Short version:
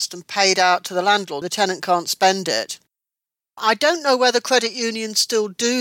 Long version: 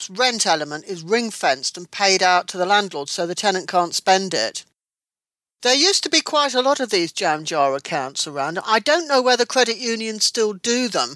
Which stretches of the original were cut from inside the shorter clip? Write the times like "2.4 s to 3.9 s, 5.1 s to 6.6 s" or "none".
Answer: 3.1 s to 3.3 s, 5.4 s to 8.6 s